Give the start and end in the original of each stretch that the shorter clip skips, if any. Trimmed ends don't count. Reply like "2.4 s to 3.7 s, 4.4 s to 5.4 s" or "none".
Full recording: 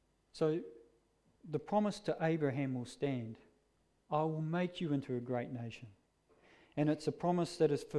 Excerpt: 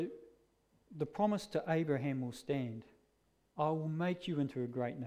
none